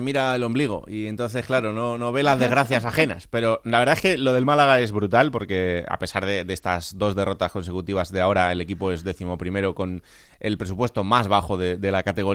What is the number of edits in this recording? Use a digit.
0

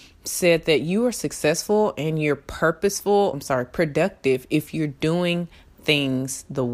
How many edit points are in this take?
1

